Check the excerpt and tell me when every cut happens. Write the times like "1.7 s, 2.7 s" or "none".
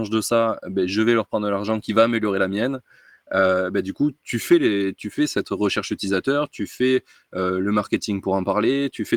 none